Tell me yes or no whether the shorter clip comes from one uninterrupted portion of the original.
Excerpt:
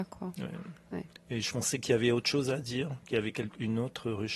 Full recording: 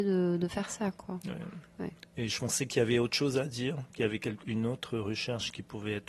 yes